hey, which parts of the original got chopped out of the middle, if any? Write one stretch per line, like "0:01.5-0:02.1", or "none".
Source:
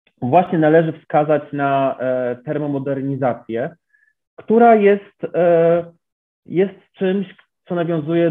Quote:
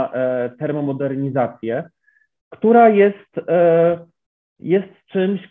none